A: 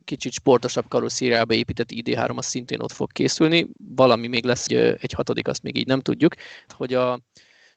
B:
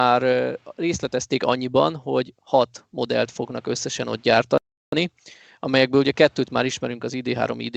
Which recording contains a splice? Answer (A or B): A